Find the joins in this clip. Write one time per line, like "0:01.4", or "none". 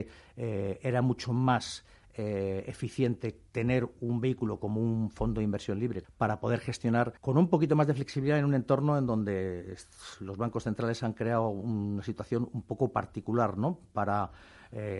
0:03.5
0:06.0
0:07.2